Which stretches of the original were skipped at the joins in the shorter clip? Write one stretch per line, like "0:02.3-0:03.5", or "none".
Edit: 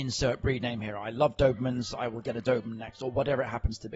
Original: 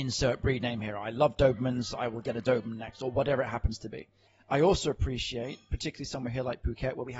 none